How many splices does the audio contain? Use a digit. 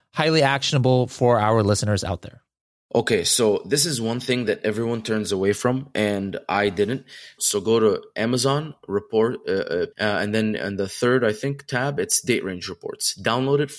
2